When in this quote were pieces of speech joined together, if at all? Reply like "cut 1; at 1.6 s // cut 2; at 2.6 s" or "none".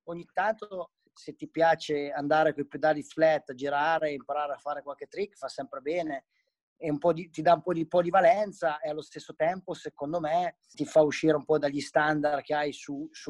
cut 1; at 10.7 s